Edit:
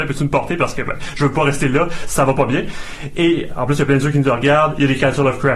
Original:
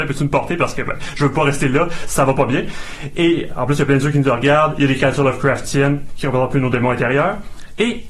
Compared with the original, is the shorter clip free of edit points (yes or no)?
yes